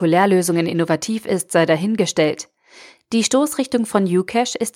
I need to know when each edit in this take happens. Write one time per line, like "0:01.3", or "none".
none